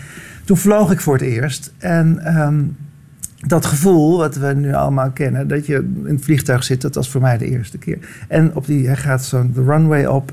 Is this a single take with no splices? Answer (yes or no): yes